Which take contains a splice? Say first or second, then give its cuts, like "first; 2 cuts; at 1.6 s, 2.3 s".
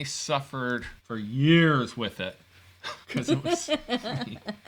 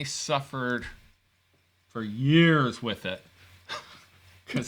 first; 2 cuts; at 1.0 s, 3.0 s